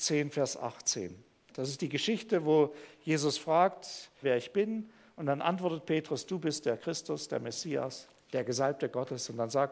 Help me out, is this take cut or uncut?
cut